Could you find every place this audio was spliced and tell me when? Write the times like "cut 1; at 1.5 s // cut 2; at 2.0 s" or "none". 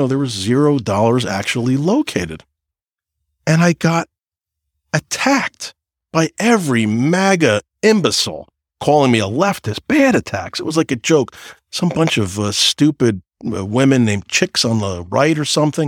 none